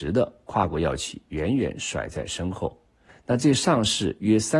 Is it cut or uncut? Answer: cut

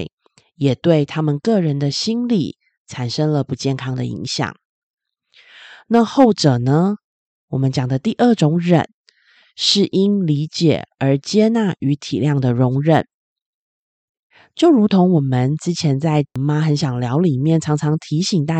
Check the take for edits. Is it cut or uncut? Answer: uncut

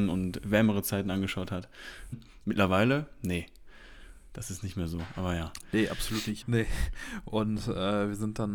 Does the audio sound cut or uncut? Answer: cut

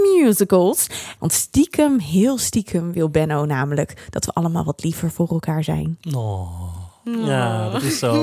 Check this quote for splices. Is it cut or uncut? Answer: cut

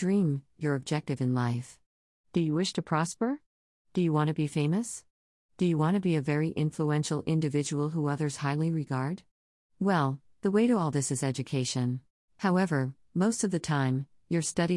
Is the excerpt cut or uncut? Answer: cut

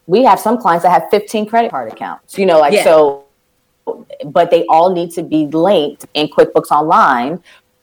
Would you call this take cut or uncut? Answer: uncut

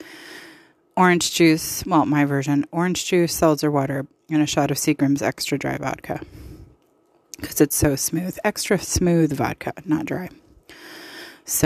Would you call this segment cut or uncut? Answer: uncut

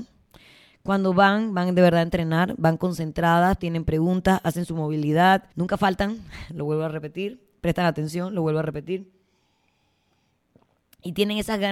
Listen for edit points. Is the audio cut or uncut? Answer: cut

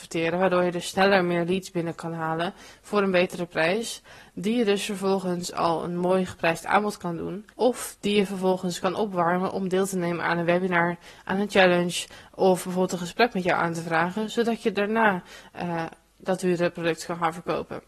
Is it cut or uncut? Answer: cut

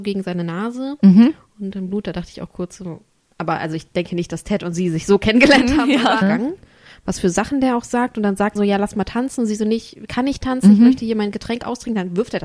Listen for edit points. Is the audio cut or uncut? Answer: cut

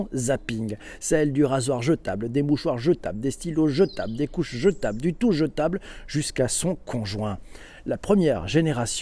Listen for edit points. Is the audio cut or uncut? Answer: uncut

